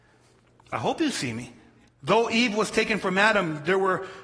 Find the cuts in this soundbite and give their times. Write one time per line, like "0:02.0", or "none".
0:01.9